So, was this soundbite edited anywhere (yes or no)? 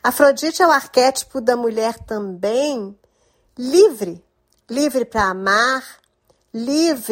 no